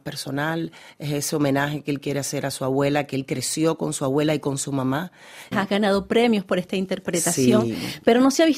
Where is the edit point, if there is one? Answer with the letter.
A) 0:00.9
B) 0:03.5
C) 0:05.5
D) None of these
C